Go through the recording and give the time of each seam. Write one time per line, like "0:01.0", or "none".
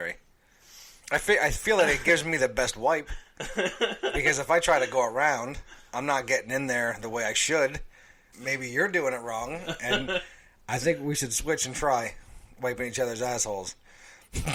0:01.0
0:08.3

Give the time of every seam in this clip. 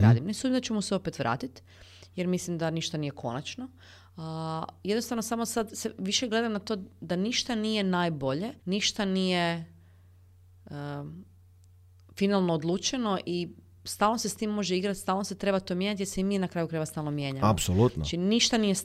0:08.6

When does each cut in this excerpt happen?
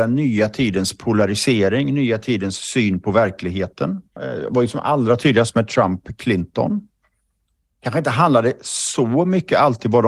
0:04.2

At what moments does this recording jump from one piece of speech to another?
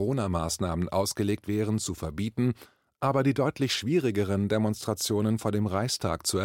none

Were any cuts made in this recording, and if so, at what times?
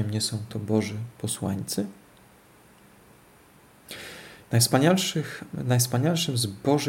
none

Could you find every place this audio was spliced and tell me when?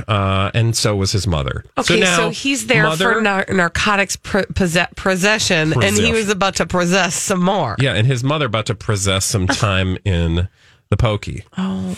none

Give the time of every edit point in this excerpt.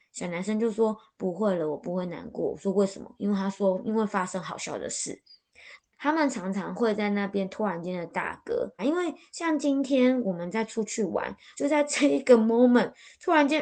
0:05.8
0:08.8
0:11.5

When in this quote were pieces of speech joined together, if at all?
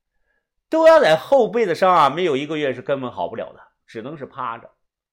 0:03.8

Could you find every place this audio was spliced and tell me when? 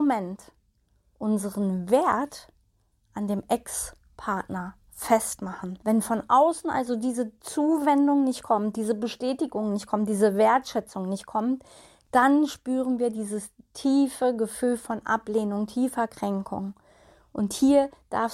none

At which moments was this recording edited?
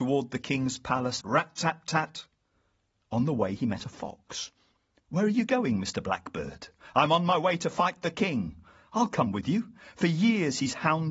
0:01.2

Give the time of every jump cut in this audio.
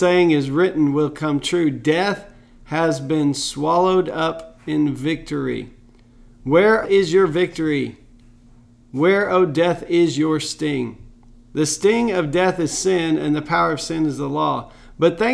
0:06.8

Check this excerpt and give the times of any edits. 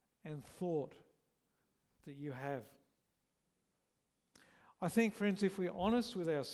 none

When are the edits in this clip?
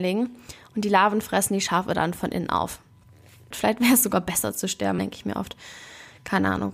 0:03.5
0:05.0

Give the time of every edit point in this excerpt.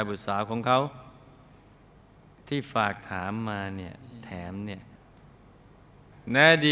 none

